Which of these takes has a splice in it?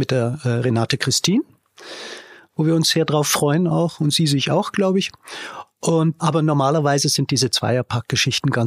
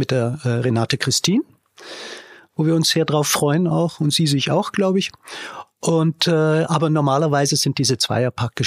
first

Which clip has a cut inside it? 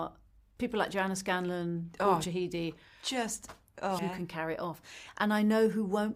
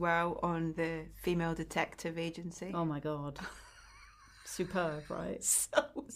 first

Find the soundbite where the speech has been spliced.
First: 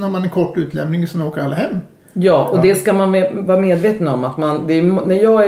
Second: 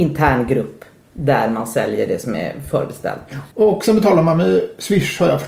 second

